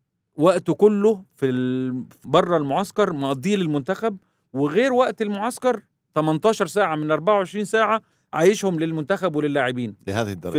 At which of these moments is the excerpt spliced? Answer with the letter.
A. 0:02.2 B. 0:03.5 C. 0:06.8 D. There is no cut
A